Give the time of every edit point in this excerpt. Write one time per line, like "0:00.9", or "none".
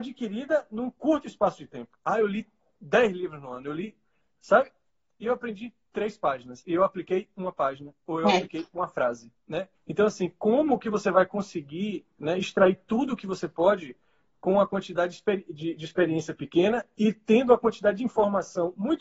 0:09.7